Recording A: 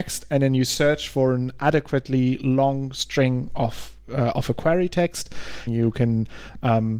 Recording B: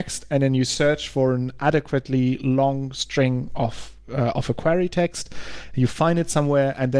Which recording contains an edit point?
A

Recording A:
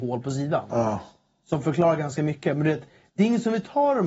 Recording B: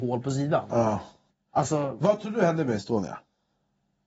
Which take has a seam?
B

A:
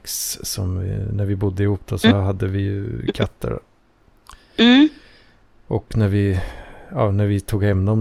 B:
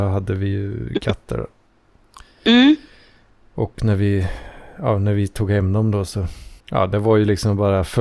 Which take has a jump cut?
B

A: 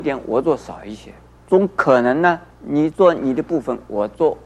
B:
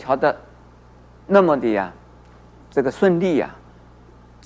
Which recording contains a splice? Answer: A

